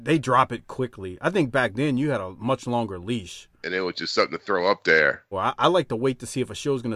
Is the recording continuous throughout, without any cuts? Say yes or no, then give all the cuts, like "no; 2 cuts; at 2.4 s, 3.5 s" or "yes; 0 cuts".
no; 2 cuts; at 3.6 s, 5.3 s